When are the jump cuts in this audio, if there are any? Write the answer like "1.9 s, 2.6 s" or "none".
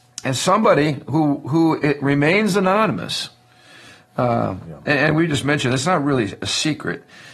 none

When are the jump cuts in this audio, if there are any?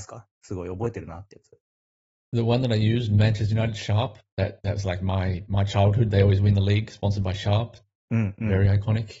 none

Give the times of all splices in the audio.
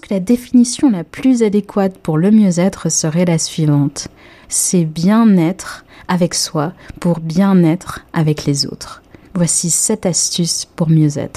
4.4 s, 9.2 s

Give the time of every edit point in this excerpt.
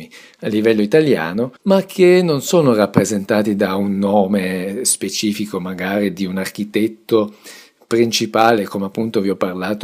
1.6 s

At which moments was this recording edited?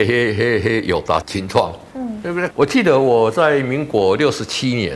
1.2 s, 2.5 s

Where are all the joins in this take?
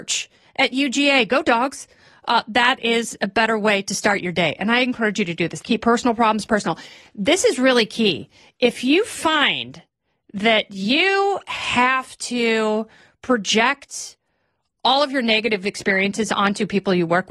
5.6 s

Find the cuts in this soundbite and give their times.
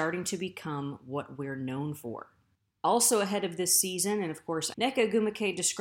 4.7 s

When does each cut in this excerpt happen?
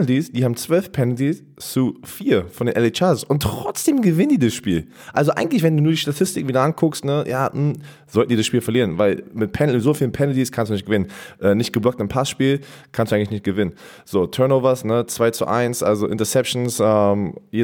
none

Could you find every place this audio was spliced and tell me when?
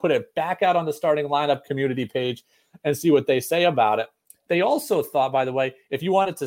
none

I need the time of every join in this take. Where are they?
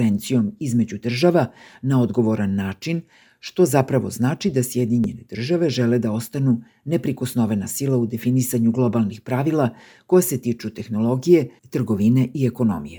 11.6 s

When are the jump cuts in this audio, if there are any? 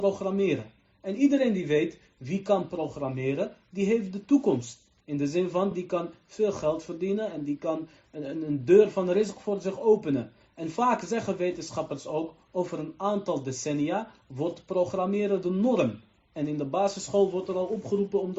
none

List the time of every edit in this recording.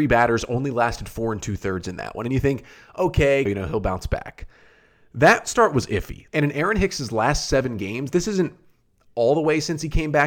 3.5 s, 6.3 s

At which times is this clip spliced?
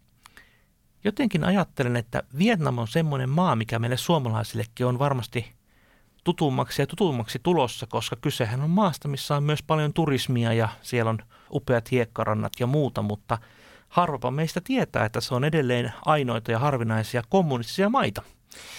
11.5 s

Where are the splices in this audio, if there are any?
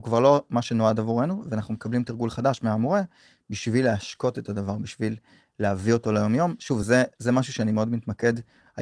none

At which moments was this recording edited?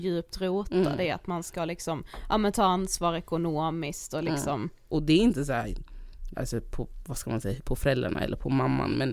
4.9 s, 6.3 s, 7.6 s

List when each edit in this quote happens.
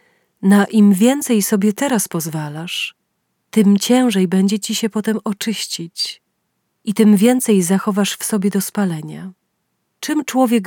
3.4 s

